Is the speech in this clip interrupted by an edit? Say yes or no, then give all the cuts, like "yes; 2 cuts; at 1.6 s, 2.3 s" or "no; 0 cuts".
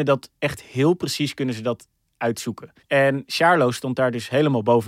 yes; 1 cut; at 2.8 s